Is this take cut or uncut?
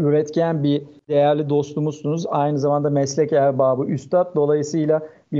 uncut